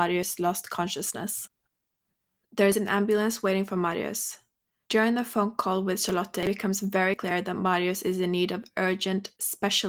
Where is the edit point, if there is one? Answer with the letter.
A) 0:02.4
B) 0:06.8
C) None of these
A